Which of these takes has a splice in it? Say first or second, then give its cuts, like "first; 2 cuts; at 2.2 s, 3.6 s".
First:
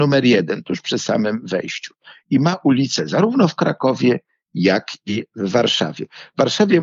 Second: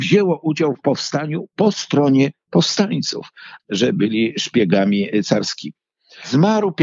second; 1 cut; at 3.6 s